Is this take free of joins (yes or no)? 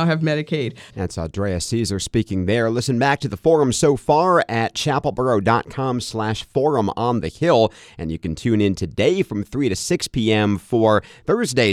no